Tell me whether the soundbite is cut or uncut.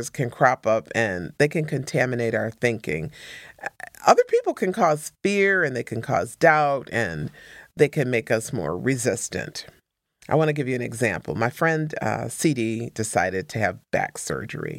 uncut